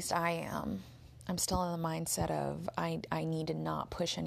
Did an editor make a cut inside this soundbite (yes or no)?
no